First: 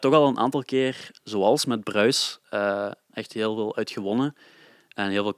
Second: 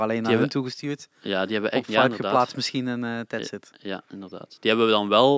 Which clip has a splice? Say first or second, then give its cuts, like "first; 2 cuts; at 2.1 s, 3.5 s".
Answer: first; 1 cut; at 3.1 s